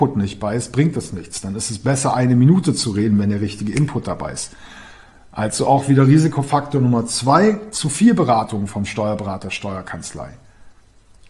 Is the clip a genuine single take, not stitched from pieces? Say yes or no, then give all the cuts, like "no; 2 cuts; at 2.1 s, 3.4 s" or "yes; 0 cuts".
yes; 0 cuts